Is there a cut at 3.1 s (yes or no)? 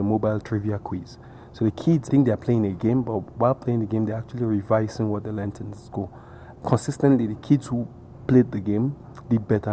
no